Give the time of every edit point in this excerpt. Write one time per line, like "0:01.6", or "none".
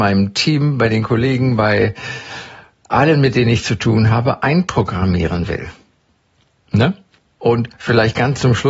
0:07.4